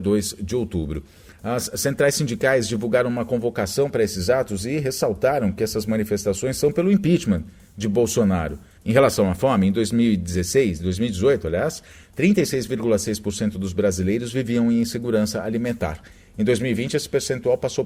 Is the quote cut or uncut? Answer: cut